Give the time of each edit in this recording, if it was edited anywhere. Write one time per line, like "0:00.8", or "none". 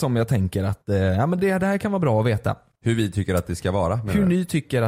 none